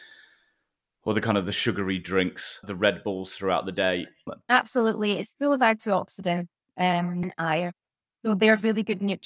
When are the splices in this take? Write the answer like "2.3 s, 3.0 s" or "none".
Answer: 2.6 s, 4.3 s, 7.2 s